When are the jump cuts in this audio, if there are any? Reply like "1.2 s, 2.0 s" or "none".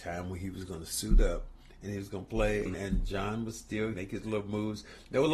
2.7 s, 3.9 s